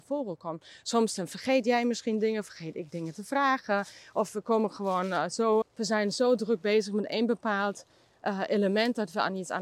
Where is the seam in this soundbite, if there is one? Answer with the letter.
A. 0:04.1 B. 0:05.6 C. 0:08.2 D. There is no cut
B